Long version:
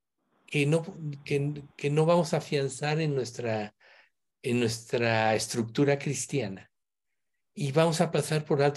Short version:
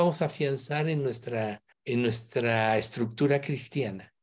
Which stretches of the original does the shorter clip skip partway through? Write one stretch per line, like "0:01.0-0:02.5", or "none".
0:03.8-0:04.3